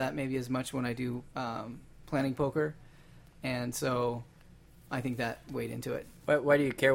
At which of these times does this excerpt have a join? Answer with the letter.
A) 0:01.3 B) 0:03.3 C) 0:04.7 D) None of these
A